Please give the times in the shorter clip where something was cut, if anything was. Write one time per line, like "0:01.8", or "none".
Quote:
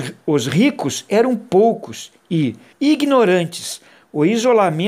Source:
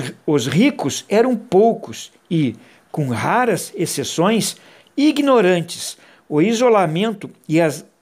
0:02.7